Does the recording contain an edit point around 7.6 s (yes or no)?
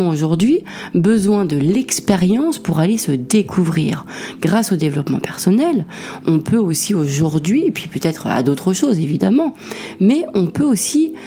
no